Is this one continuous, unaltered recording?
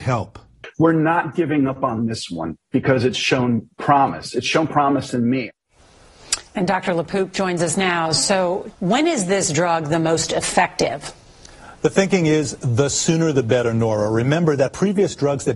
no; 1 cut; at 8.7 s

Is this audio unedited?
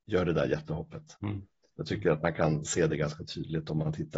no; 1 cut; at 1.2 s

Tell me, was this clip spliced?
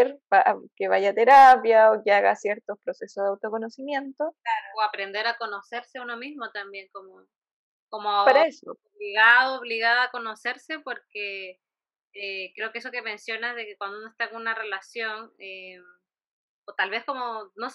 no; 0 cuts

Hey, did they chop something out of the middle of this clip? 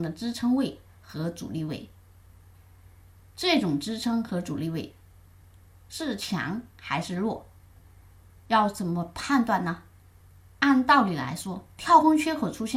yes; 1 cut; at 10.5 s

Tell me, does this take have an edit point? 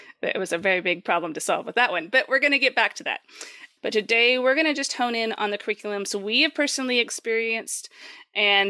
yes; 1 cut; at 3.8 s

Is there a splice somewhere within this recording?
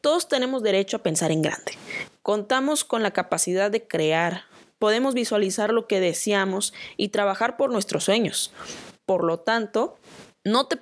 no; 0 cuts

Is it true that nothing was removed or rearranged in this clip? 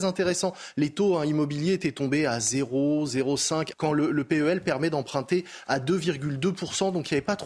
no; 1 cut; at 3.7 s

